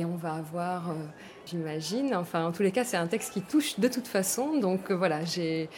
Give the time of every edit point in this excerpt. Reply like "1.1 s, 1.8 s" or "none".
1.5 s